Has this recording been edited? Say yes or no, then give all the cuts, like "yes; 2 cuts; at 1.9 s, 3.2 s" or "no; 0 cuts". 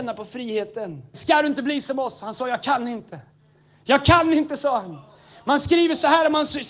yes; 1 cut; at 1.1 s